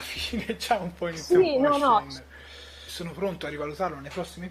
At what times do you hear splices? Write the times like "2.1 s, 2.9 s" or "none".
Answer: 2.9 s